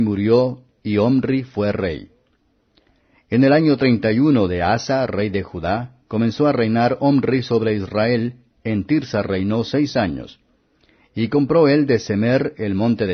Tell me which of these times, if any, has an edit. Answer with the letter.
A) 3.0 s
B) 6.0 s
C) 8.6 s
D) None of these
C